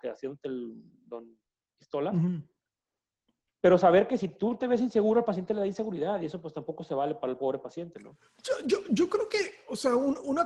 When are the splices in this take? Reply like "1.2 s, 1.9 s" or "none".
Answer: none